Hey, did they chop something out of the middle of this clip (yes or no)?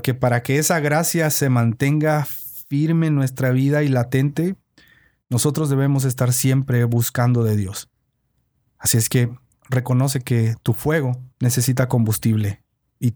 yes